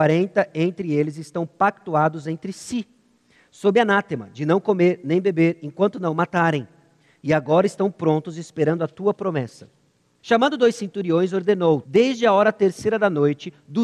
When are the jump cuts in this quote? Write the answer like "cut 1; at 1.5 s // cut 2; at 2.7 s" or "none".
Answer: cut 1; at 10.2 s // cut 2; at 11.8 s